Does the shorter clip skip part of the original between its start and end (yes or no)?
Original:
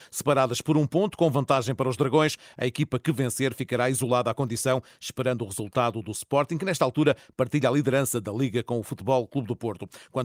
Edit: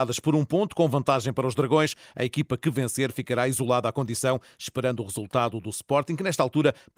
no